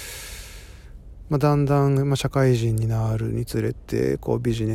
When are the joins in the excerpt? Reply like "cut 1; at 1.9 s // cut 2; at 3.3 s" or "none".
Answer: none